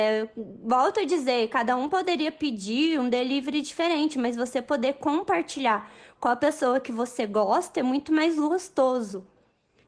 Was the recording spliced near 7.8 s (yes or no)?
no